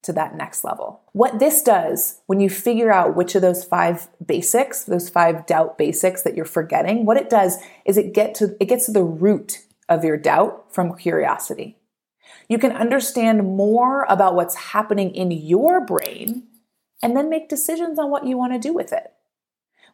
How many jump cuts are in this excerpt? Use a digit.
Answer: 1